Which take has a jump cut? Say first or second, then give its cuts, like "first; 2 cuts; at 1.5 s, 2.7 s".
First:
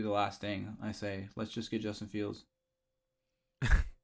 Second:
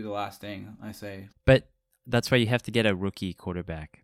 second; 1 cut; at 1.3 s